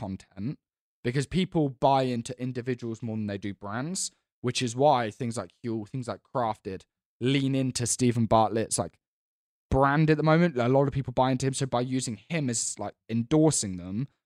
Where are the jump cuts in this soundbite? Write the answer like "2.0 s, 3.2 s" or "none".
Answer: none